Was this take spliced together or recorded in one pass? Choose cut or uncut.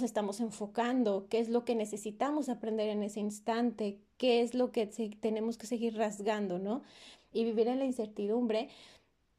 cut